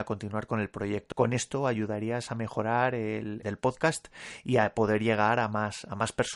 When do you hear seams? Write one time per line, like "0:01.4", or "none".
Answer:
0:01.1
0:03.4